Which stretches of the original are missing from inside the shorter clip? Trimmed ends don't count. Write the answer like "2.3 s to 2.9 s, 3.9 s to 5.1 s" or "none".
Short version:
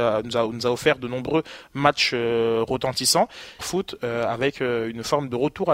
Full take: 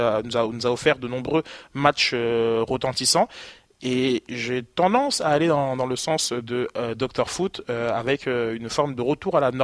3.6 s to 7.2 s